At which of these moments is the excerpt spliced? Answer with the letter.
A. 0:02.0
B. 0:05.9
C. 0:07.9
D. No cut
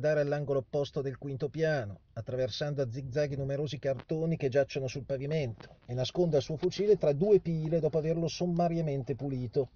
D